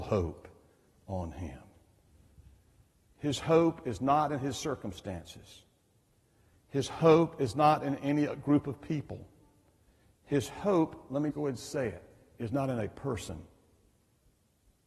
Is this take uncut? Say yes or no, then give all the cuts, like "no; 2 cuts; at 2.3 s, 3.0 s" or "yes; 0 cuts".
no; 1 cut; at 11.3 s